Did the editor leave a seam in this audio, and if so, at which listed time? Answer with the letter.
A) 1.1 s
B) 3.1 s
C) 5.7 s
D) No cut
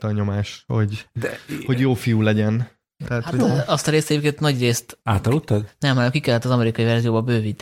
B